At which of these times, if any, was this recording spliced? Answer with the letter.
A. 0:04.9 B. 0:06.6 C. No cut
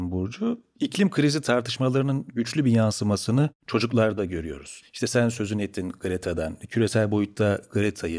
C